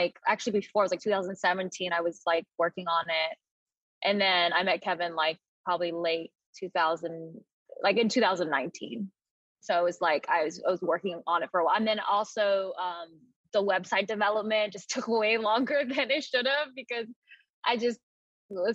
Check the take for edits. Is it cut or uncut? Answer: cut